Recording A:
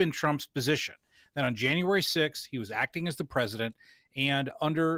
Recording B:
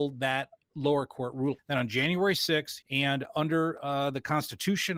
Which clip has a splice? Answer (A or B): B